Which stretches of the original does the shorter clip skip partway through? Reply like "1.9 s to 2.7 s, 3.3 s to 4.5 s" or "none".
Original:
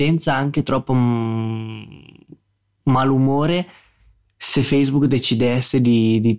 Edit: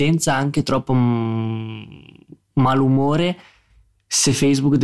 2.4 s to 2.7 s